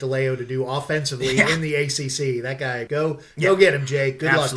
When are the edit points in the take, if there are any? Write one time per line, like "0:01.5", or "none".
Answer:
0:02.9